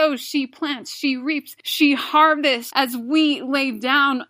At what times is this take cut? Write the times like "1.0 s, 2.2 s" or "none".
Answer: 2.7 s